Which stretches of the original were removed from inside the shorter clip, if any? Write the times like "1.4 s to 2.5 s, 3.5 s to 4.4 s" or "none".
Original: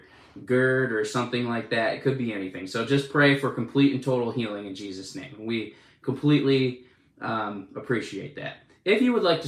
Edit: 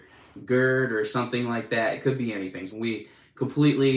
2.7 s to 5.4 s